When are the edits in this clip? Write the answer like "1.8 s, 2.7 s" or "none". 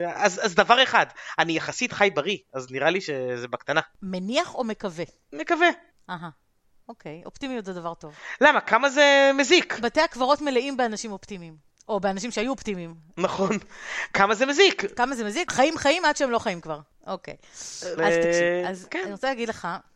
15.5 s, 18.0 s